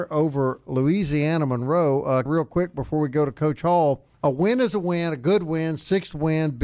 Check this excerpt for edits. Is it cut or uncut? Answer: cut